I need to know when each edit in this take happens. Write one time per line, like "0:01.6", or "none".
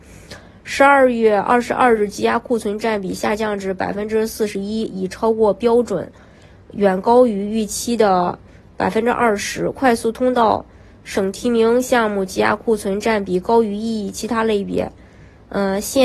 none